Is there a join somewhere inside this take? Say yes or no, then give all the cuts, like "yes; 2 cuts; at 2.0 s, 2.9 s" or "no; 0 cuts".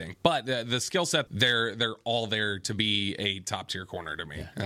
yes; 1 cut; at 1.3 s